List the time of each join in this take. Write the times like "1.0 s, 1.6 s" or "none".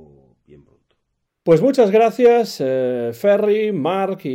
1.3 s